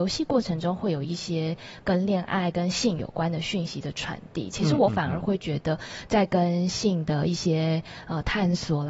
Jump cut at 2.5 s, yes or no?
no